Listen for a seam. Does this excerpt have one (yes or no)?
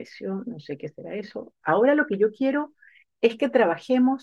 yes